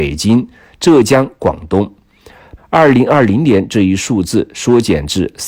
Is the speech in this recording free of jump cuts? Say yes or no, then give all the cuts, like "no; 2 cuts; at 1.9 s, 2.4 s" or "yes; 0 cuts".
no; 1 cut; at 2.6 s